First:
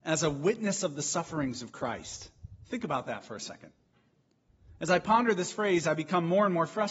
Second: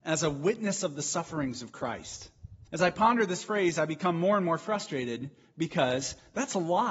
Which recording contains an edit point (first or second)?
second